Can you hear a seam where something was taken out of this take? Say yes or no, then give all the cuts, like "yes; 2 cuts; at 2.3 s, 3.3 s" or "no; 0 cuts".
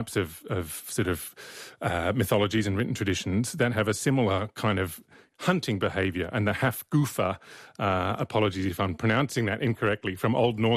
no; 0 cuts